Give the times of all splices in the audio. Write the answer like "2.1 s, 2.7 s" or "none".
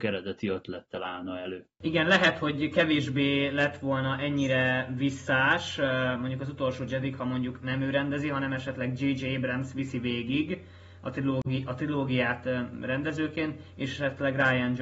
none